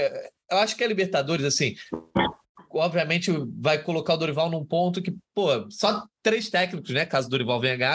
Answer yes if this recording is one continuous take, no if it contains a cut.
yes